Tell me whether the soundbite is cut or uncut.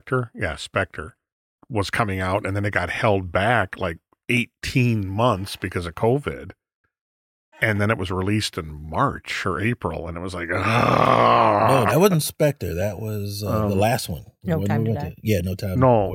cut